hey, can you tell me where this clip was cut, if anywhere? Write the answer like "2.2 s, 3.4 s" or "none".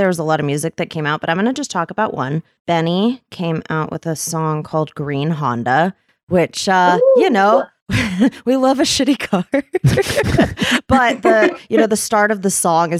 none